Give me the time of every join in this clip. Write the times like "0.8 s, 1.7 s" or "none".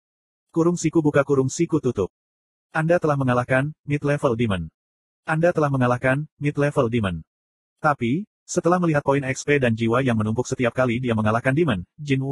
none